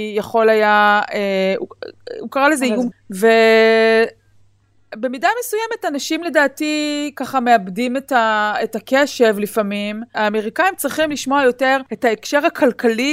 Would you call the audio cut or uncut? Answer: cut